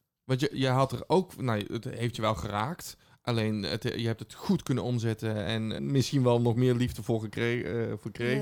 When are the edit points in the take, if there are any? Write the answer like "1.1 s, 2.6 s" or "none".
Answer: 5.8 s